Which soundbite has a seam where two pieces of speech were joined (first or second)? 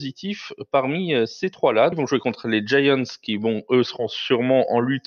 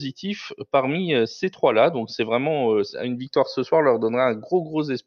first